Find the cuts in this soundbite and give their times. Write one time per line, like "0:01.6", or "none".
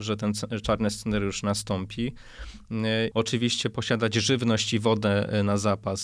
0:03.1